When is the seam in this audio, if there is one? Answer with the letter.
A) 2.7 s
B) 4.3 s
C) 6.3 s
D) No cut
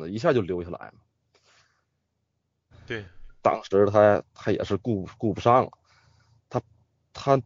A